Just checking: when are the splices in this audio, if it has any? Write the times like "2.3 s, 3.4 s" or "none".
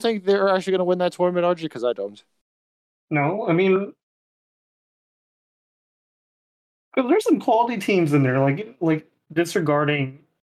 9.3 s